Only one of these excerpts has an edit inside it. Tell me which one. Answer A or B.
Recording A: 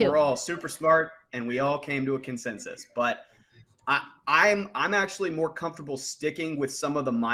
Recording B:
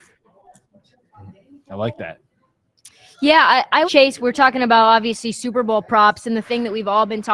B